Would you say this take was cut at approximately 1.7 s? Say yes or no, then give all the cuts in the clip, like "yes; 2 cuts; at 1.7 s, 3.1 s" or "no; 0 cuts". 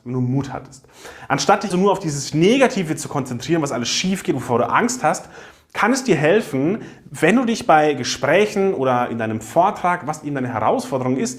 yes; 1 cut; at 1.7 s